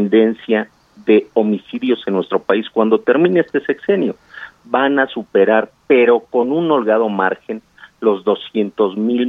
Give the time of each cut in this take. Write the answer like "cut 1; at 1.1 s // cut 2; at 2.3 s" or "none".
none